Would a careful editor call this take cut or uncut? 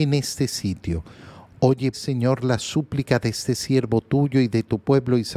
cut